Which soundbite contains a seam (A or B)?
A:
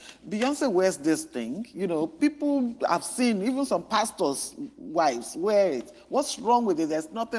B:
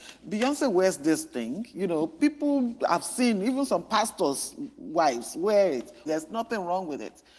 B